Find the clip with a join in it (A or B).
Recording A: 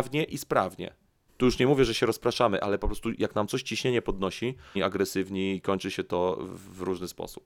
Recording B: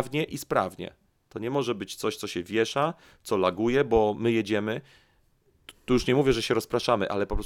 A